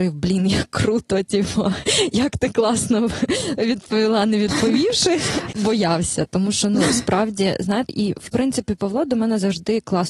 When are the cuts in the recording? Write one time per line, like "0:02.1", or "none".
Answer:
0:05.5
0:07.9